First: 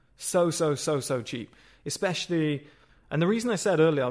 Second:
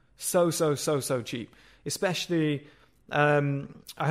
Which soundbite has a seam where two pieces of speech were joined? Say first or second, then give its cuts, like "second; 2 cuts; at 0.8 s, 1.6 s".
first; 1 cut; at 2.9 s